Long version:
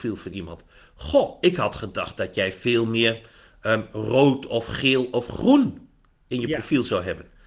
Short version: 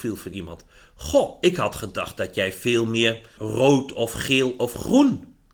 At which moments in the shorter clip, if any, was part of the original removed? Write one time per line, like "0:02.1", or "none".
0:03.4